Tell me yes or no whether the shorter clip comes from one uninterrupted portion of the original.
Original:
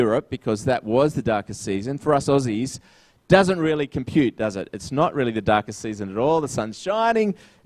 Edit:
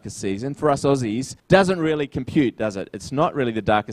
no